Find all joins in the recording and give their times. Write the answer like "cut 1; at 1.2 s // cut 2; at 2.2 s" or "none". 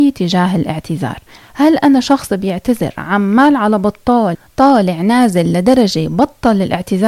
none